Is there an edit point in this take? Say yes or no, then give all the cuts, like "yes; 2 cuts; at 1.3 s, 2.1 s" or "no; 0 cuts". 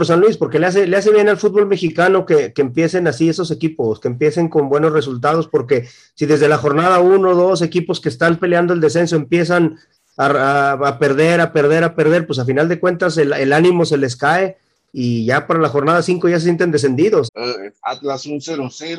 yes; 1 cut; at 17.3 s